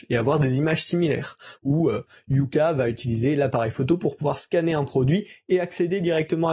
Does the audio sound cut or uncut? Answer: uncut